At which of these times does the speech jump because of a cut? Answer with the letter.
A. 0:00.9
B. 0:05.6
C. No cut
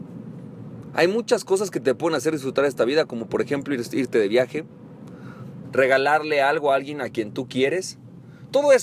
B